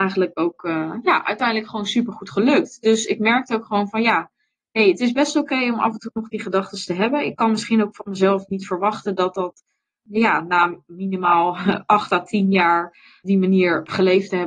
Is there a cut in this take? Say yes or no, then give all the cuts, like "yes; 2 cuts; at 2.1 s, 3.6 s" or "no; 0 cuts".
no; 0 cuts